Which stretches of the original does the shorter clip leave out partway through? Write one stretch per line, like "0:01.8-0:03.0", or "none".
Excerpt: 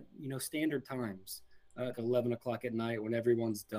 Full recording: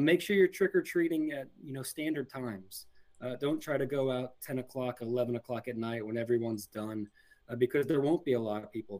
0:03.4-0:05.0